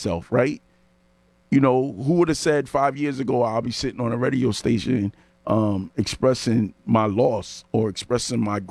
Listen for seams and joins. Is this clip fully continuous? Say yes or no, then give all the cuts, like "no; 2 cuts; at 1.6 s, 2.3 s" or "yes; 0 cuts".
yes; 0 cuts